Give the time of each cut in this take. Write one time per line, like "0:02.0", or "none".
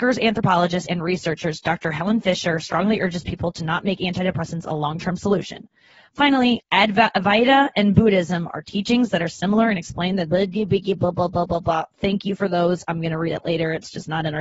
0:06.6